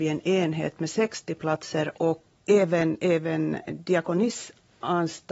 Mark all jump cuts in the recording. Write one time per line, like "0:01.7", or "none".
0:02.4